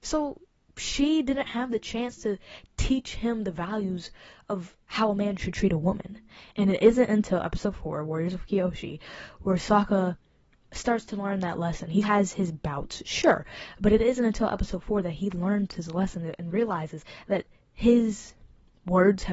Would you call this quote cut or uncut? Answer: cut